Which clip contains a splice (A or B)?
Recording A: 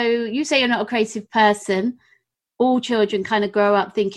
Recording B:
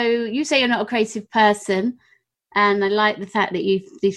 A